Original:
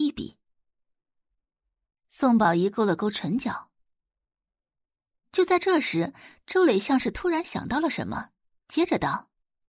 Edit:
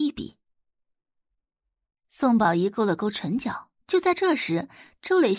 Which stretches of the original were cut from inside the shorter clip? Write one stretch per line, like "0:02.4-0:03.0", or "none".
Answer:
0:03.8-0:05.3